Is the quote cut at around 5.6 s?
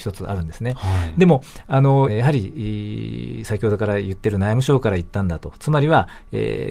no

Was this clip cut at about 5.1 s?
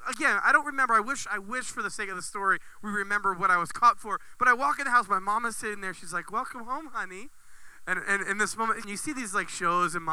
no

